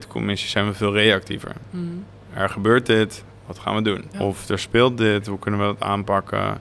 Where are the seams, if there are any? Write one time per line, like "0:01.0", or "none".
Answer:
0:04.1